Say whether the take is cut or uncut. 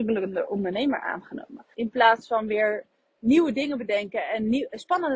cut